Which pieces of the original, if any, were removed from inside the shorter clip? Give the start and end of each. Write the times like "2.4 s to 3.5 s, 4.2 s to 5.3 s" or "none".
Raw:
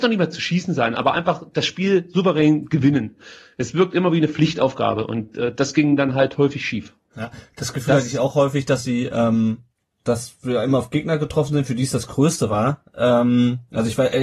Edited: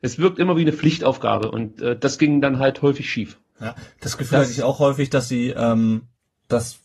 none